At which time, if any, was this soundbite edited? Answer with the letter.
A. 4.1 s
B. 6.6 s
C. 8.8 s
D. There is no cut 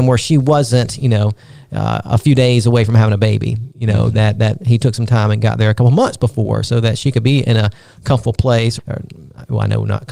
C